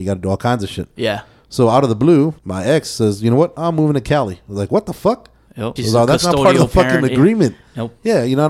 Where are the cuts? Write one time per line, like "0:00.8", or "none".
0:02.4
0:05.8

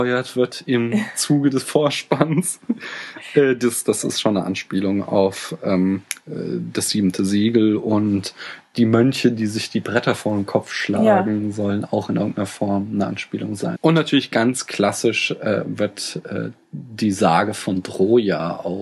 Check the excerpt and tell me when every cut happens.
0:13.7

